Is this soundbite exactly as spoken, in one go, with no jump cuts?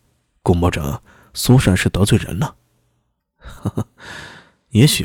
no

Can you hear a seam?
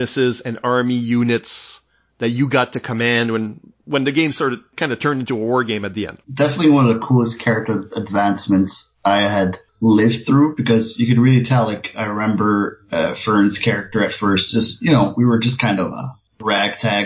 no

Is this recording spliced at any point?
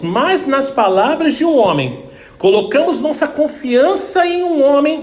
no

